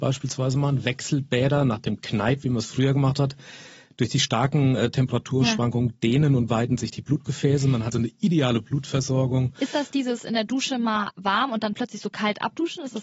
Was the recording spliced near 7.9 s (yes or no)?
yes